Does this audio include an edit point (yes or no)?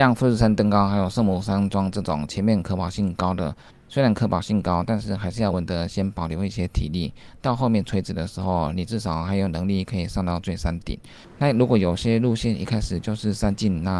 yes